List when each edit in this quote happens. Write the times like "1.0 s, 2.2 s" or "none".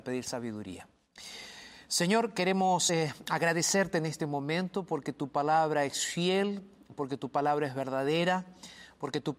none